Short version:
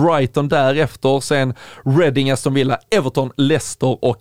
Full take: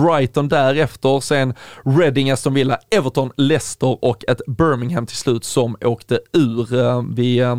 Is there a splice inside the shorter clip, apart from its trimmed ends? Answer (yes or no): no